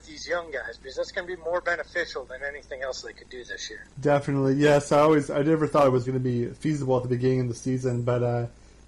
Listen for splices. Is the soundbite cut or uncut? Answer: cut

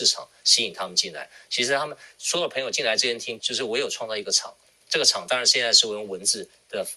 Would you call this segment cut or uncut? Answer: cut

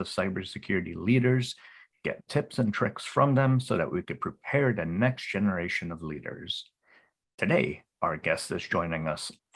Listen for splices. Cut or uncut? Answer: uncut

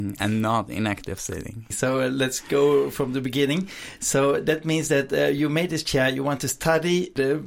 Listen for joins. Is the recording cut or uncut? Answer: cut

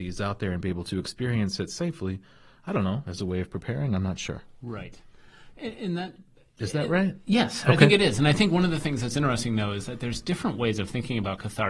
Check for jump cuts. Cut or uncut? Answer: uncut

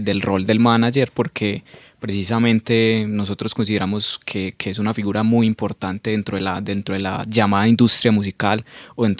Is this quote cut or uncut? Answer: uncut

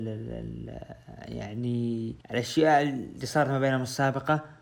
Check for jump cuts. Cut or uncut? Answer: cut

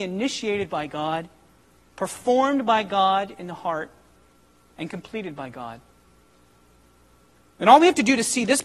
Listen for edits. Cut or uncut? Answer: uncut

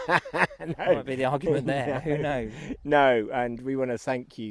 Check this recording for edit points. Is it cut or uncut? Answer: uncut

